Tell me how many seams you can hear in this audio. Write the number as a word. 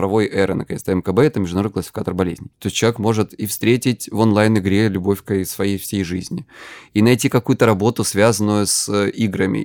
one